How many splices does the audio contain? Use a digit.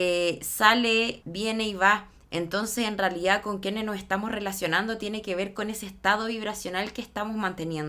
1